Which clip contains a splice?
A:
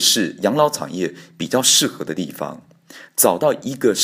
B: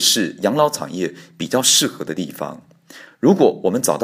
B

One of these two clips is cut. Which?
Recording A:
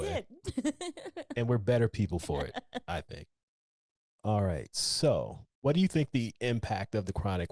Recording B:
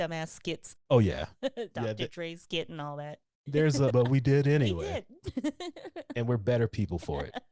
B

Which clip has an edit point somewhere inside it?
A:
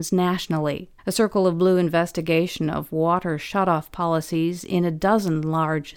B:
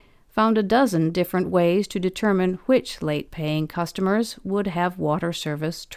A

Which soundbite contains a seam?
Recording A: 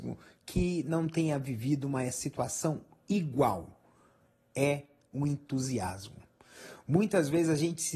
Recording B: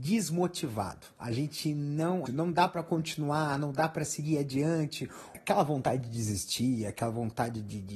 B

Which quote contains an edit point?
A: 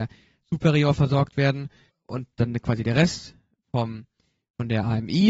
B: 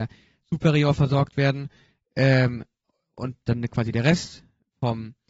A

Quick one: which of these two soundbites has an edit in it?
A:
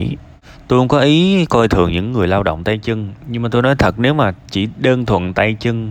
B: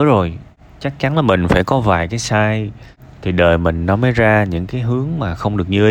A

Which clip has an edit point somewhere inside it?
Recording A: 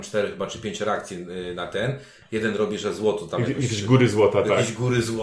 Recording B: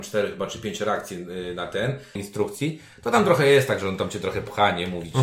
B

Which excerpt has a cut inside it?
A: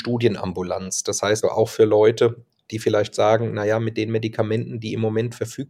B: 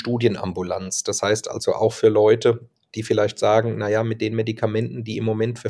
A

